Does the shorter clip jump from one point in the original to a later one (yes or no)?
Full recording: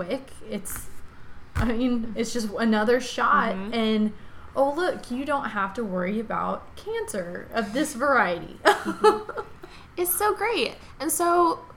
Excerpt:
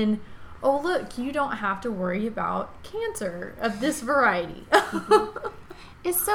no